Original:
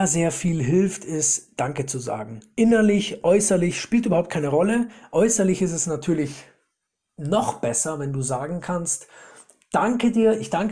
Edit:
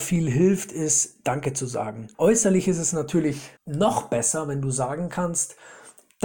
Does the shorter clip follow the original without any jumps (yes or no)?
no